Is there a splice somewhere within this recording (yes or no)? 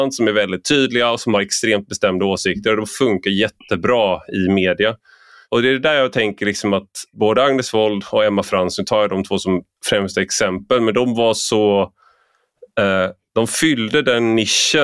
no